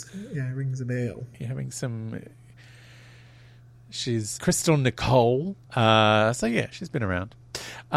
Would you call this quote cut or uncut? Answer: cut